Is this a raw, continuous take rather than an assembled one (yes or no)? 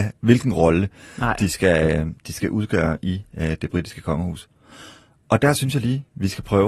yes